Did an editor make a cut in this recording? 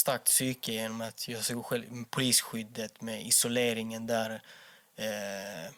no; 0 cuts

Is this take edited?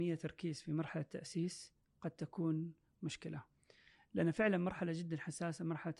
no; 0 cuts

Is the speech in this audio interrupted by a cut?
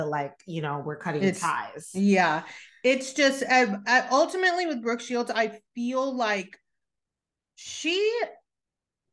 no; 0 cuts

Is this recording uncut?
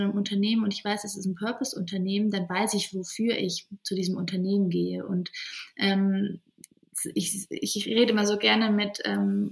yes; 0 cuts

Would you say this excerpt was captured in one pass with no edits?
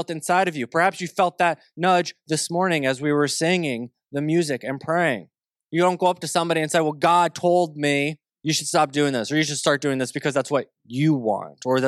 no; 2 cuts; at 5.7 s, 8.3 s

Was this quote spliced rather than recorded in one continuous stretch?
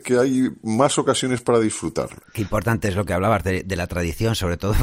yes; 1 cut; at 2.2 s

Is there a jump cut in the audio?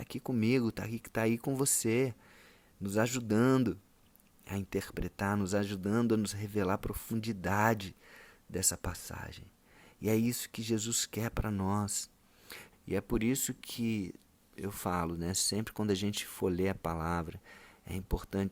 yes; 1 cut; at 12.7 s

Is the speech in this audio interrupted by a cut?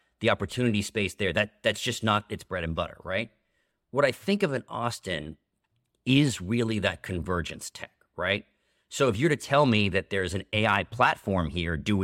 no; 0 cuts

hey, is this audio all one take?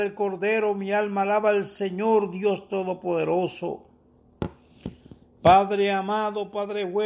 yes; 0 cuts

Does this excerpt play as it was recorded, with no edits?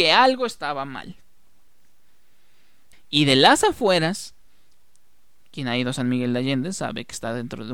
no; 1 cut; at 2.9 s

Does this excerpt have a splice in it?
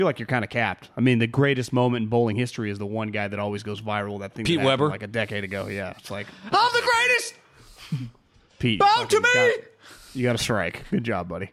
no; 0 cuts

